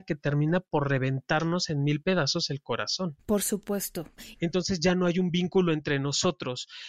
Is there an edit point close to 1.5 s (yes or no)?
no